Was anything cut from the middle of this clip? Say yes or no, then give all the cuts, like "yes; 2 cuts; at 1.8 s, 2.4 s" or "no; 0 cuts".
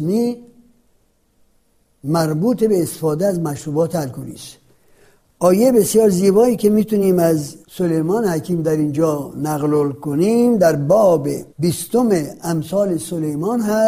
yes; 2 cuts; at 7.6 s, 11.5 s